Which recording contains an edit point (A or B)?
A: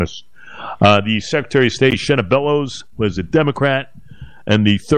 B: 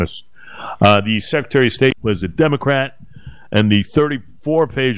B